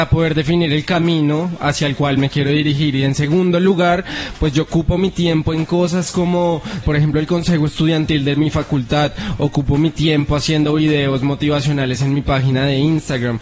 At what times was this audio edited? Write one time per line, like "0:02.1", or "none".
0:06.8